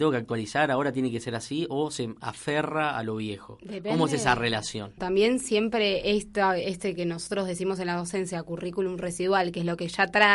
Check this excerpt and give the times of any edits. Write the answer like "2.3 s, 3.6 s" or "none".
5.0 s